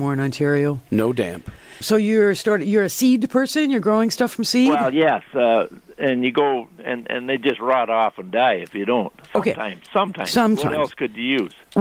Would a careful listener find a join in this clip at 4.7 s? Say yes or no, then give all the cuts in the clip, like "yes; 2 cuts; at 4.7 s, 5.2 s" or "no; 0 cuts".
no; 1 cut; at 1.8 s